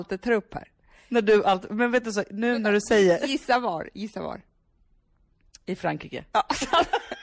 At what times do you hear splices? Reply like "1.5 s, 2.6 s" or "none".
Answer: none

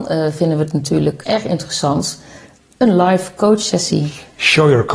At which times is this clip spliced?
1.2 s

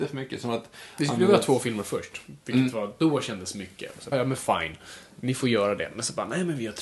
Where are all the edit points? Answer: 4.1 s

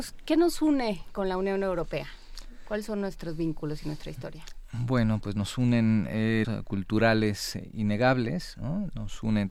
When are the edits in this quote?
6.4 s

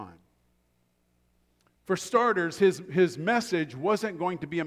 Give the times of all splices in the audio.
1.8 s

